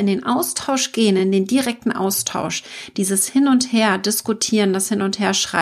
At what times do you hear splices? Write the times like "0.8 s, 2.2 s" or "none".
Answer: none